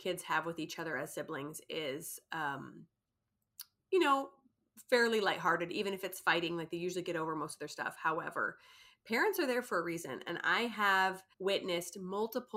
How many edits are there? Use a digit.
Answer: 1